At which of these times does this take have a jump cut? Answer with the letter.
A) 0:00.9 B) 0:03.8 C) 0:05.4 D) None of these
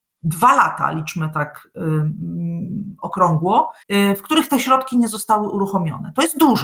B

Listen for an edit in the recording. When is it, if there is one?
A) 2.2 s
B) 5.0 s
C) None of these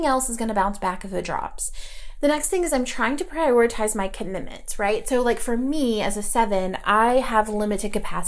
A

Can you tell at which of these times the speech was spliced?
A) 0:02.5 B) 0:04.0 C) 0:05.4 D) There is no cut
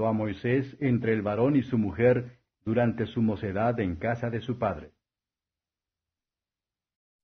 A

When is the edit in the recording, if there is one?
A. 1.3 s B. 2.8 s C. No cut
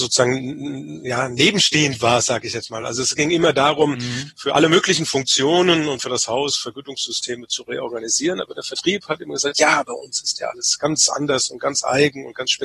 C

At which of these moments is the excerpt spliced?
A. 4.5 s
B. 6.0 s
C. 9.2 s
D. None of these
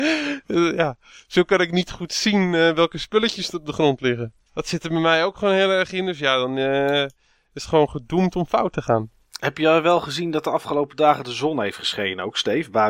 A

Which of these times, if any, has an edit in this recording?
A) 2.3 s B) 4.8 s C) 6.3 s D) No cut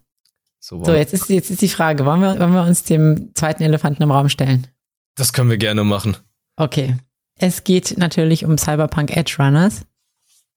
A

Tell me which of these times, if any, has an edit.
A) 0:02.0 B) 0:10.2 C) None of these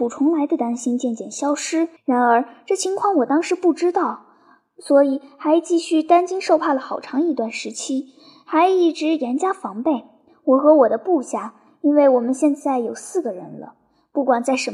A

